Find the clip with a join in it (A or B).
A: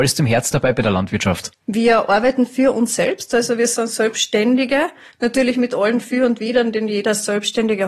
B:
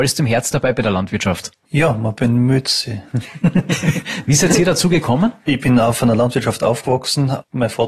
A